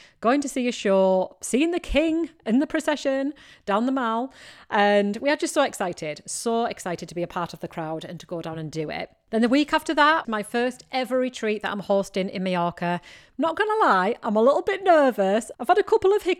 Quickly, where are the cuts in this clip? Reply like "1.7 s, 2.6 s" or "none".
10.2 s